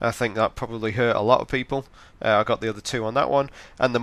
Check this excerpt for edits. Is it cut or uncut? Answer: uncut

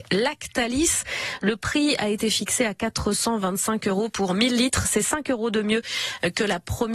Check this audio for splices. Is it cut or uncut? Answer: uncut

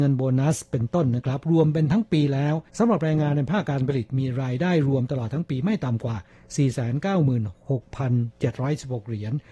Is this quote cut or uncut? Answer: cut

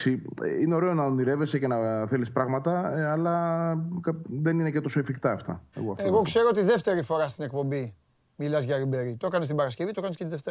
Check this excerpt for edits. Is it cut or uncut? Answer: cut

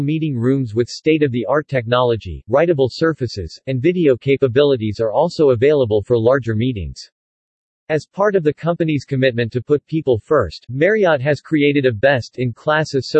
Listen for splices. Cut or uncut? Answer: uncut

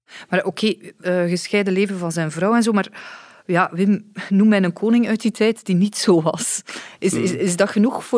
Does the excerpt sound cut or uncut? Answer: cut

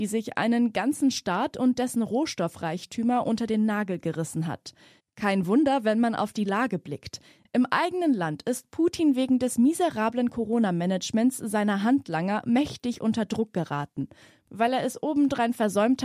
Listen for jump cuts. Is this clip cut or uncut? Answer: cut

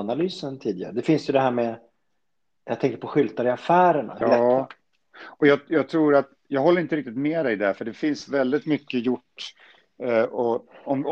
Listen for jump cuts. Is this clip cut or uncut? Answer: cut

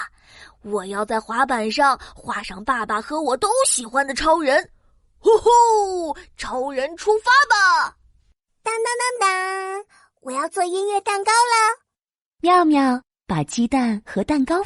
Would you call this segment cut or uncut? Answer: uncut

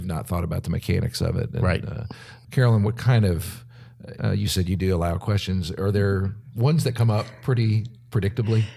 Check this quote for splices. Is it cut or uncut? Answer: cut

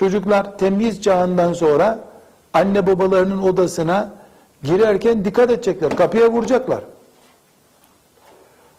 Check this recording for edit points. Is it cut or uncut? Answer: uncut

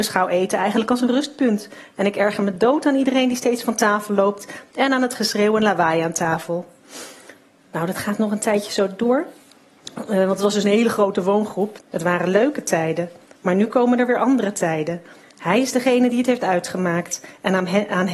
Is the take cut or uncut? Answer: cut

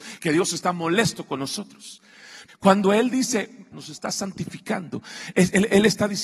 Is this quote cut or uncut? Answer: cut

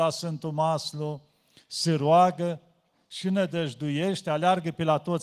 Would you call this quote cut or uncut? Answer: uncut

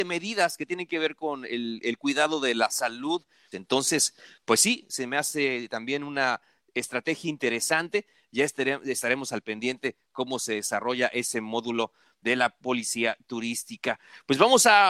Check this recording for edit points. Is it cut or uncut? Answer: cut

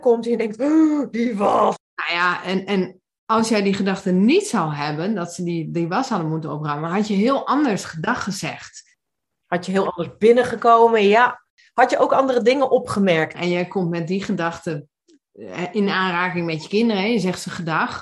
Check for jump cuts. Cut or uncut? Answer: cut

